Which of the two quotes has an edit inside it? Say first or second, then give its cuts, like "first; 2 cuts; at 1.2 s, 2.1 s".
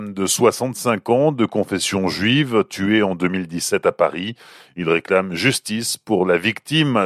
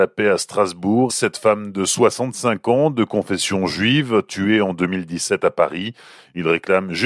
second; 1 cut; at 1.1 s